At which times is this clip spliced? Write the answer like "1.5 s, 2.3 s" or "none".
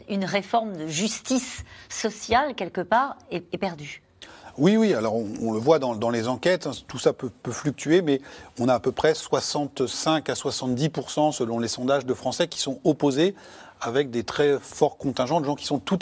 none

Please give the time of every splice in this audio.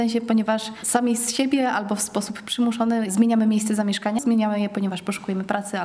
4.2 s

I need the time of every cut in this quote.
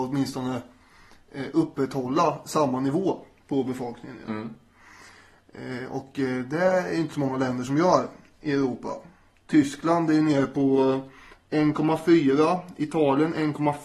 none

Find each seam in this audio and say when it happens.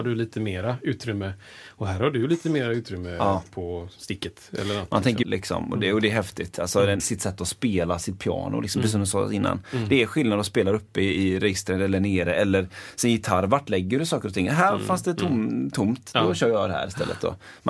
5.2 s, 7.0 s

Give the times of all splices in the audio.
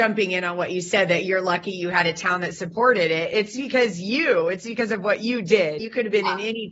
5.8 s

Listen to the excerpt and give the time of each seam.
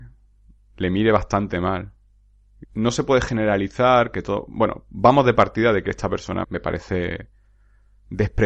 2.6 s, 6.4 s

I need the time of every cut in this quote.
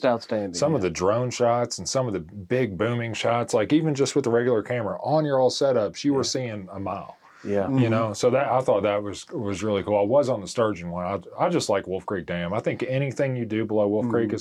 none

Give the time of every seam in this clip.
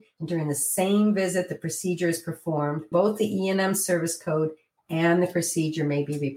2.9 s

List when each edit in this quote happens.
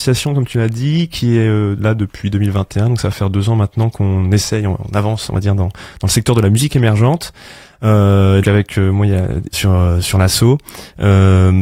8.4 s, 9.5 s

